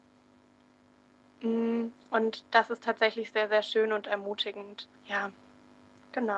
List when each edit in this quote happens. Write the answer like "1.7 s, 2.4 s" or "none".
4.9 s

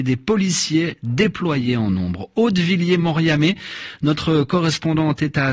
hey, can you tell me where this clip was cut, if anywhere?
none

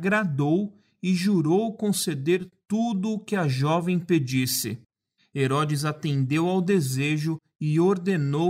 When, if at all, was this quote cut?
5.2 s

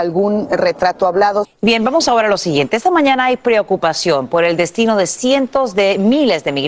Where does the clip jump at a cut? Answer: 1.4 s

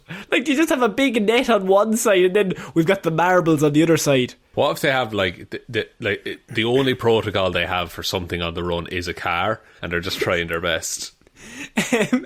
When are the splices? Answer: 4.5 s, 9.8 s

